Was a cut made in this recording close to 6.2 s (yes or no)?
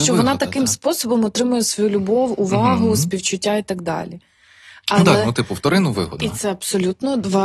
yes